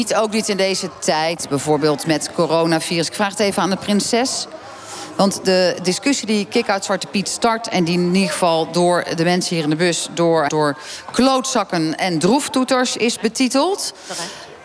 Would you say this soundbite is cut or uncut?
cut